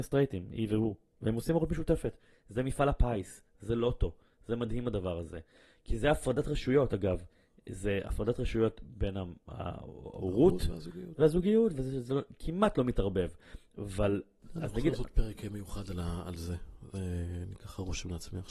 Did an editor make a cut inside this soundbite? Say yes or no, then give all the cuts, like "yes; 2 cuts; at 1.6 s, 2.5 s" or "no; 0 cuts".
no; 0 cuts